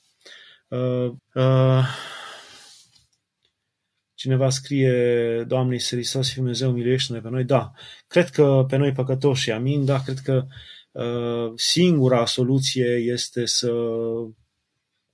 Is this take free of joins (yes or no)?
no